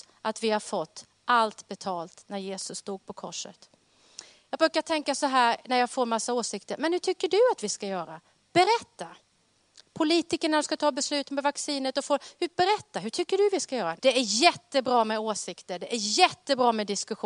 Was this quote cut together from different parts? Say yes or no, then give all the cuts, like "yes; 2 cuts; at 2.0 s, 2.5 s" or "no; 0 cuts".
yes; 1 cut; at 14.0 s